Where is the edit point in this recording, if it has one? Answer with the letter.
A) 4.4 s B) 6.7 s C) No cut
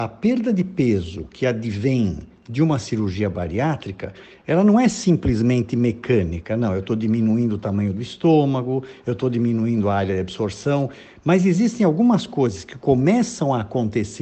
C